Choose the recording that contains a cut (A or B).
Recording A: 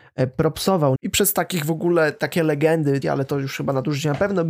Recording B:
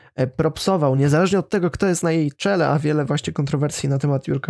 A